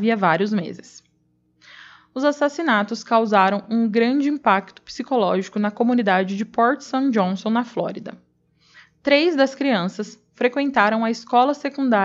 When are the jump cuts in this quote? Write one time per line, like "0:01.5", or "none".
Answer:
none